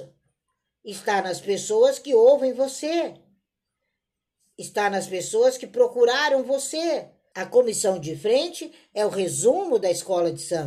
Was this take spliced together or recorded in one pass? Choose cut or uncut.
cut